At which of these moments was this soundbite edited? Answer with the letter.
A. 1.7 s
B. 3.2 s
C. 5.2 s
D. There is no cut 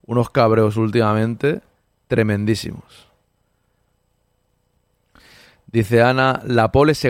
D